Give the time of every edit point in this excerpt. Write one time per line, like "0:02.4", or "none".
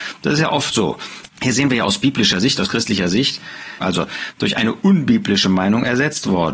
0:01.3
0:03.8